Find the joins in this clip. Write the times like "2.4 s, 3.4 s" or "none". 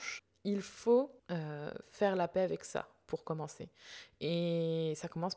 1.2 s